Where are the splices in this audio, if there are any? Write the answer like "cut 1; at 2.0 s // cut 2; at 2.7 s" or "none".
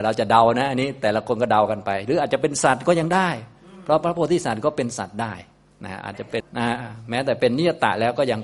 cut 1; at 6.4 s